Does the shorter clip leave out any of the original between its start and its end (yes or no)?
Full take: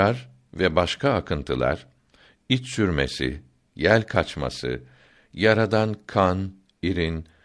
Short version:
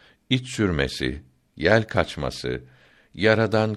no